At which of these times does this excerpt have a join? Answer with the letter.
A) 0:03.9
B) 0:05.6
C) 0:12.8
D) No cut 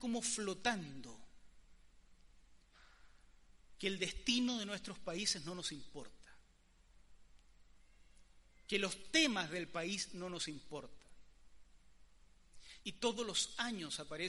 C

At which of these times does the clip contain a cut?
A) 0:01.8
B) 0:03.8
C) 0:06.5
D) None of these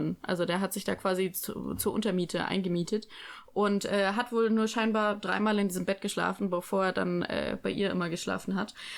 D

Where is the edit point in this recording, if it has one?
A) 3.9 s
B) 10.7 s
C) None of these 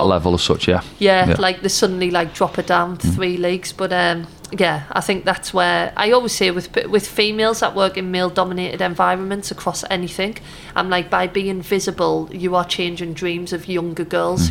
C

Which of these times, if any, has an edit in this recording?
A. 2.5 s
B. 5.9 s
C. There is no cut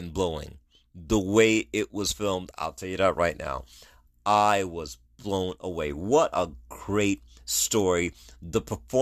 A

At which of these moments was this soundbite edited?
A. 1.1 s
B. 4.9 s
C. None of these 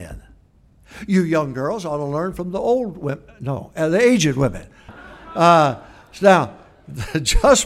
B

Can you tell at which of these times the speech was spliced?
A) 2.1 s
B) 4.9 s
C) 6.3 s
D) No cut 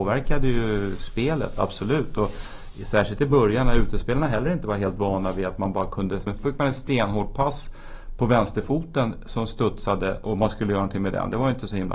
C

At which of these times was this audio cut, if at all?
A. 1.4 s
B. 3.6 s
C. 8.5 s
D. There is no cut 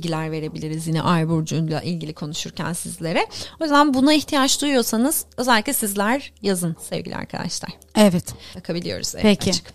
C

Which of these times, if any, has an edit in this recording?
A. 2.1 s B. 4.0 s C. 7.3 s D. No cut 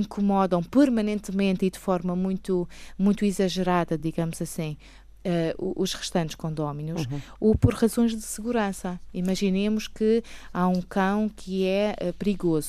D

